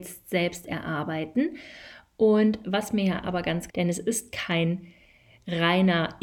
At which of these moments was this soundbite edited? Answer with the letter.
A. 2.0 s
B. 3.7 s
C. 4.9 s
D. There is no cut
B